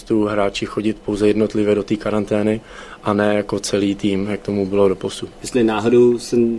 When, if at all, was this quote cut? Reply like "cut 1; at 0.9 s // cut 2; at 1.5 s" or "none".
cut 1; at 5.3 s